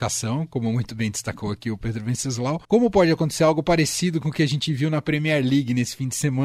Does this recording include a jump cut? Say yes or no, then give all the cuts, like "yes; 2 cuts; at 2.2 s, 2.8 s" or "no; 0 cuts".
yes; 1 cut; at 2.6 s